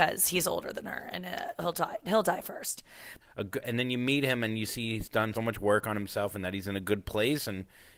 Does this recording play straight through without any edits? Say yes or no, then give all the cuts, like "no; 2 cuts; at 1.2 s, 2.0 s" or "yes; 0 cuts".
no; 2 cuts; at 3.2 s, 5.3 s